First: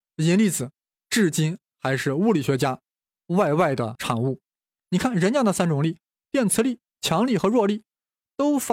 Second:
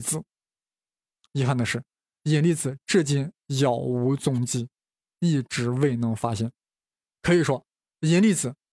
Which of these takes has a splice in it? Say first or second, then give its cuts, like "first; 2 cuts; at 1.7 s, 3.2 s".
first; 1 cut; at 4.8 s